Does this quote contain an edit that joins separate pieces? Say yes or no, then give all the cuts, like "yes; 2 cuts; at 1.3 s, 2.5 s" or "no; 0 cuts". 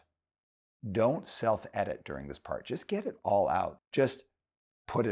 yes; 1 cut; at 3.8 s